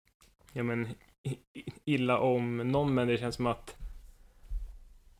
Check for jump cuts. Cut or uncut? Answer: uncut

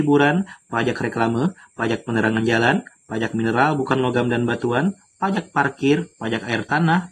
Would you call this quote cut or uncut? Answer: uncut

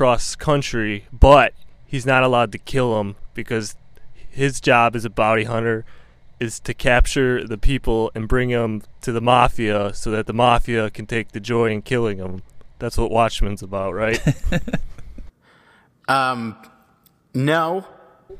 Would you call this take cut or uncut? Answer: uncut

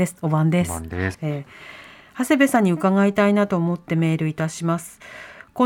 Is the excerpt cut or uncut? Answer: cut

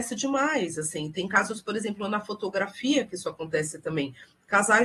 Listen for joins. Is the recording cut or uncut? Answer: uncut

